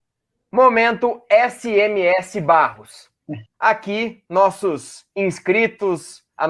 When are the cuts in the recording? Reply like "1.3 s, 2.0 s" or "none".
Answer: 3.5 s